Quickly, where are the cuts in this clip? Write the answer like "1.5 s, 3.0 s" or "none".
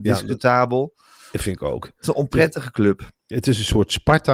none